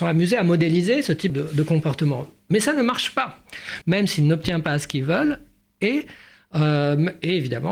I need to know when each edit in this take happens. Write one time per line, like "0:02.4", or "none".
0:01.3
0:03.8